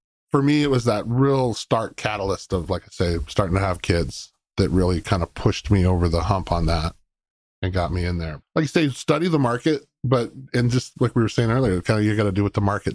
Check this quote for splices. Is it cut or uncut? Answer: cut